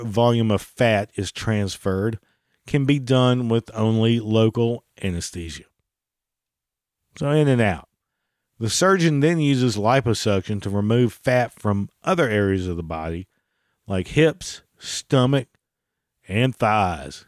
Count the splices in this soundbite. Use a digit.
0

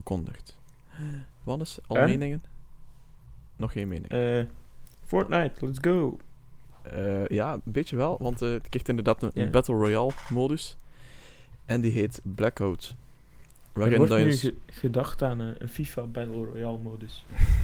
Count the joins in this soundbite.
0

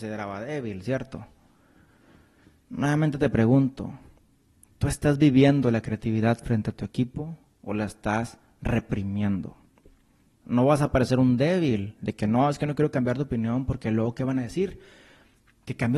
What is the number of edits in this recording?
1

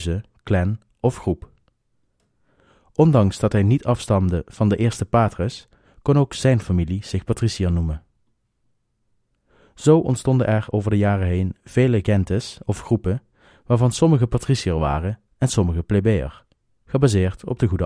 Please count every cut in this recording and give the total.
0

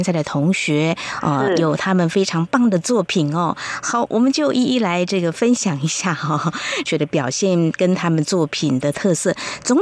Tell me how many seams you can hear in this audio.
1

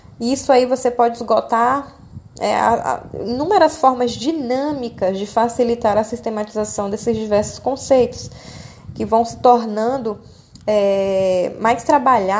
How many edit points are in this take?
0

